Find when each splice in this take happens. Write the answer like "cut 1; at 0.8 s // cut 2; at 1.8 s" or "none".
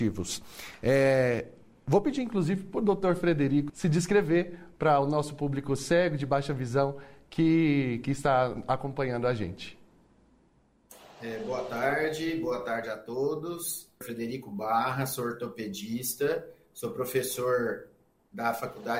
cut 1; at 3.7 s // cut 2; at 14.0 s